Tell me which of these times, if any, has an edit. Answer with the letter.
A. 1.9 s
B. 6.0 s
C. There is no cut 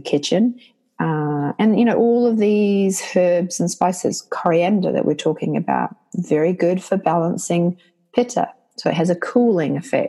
C